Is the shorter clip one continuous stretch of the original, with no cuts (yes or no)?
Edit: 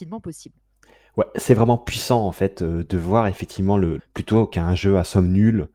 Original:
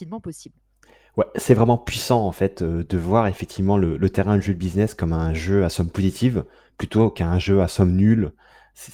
no